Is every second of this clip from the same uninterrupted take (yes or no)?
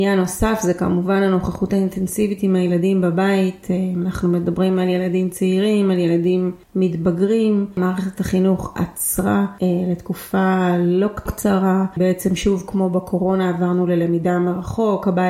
yes